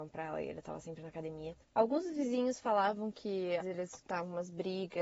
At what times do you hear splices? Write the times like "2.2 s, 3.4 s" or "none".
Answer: 1.6 s, 3.6 s